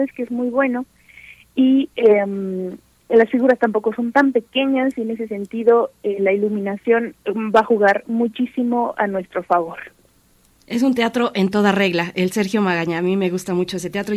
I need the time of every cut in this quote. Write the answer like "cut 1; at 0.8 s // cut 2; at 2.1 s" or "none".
none

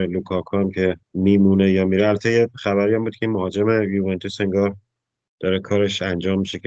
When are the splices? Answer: cut 1; at 1.0 s

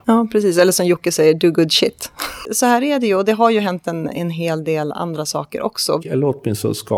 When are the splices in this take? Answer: cut 1; at 6.0 s

